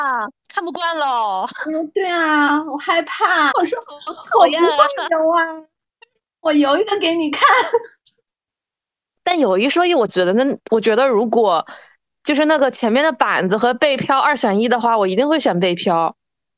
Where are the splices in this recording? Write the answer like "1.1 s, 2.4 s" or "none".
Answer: 3.5 s